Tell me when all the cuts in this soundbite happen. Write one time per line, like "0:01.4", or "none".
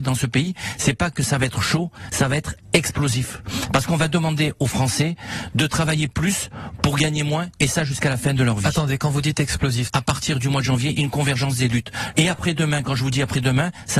0:02.1
0:09.9
0:12.1